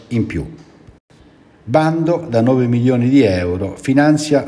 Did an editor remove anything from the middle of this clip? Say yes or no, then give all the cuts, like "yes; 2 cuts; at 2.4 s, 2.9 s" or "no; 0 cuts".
no; 0 cuts